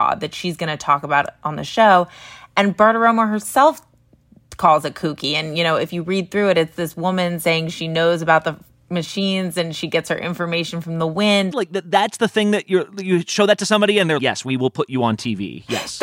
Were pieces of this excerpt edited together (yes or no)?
yes